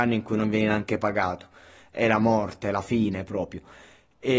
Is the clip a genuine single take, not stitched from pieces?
yes; 0 cuts

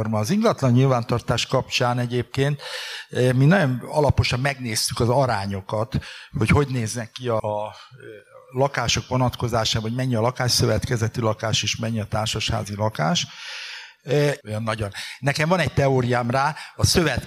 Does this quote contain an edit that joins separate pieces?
yes; 2 cuts; at 7.4 s, 14.4 s

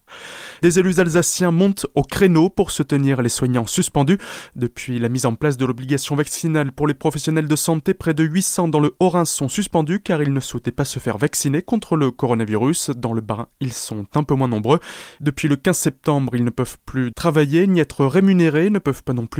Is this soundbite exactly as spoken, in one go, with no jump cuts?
no; 1 cut; at 17.1 s

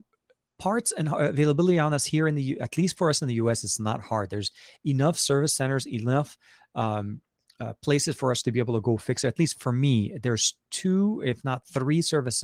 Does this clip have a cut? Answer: no; 0 cuts

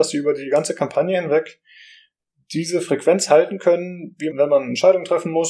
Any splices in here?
yes; 1 cut; at 4.3 s

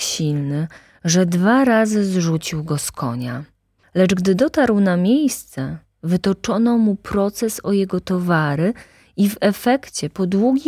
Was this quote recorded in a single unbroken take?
no; 1 cut; at 3.8 s

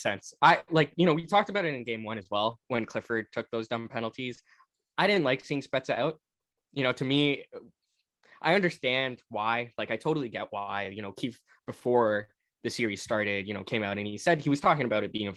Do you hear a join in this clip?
no; 0 cuts

